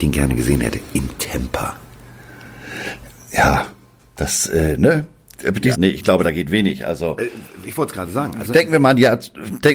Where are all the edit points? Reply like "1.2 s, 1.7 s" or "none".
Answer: 5.7 s